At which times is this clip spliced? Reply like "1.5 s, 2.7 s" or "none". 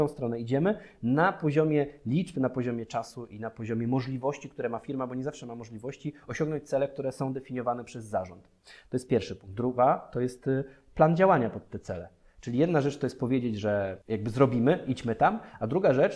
14.0 s